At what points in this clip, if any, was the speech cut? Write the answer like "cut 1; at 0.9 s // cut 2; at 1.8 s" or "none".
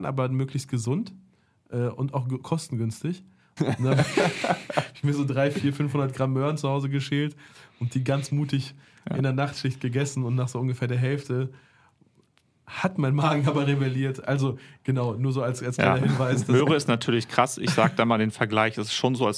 cut 1; at 3.6 s

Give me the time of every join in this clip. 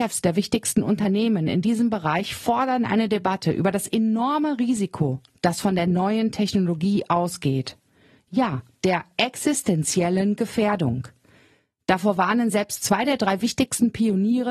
cut 1; at 8.2 s

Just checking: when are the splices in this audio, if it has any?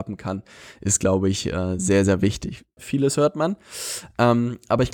cut 1; at 2.8 s

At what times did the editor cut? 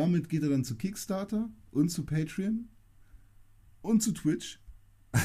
none

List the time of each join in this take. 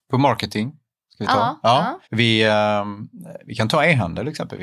cut 1; at 2.0 s

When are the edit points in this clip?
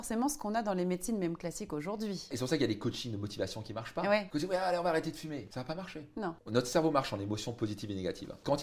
none

